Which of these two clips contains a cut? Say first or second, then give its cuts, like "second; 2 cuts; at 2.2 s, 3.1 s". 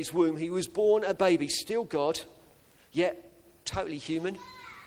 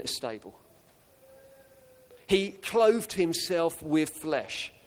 first; 1 cut; at 1.2 s